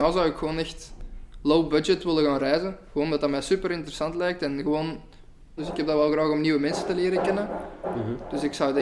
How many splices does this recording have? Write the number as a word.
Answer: one